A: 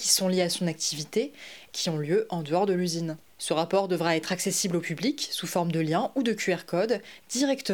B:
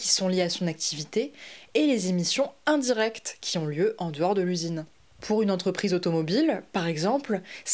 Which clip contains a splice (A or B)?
A